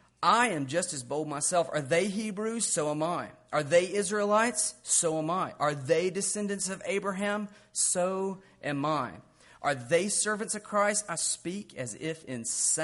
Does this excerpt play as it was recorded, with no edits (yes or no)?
yes